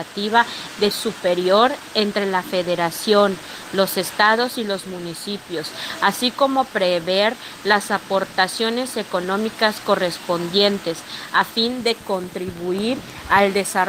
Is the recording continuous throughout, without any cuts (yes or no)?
no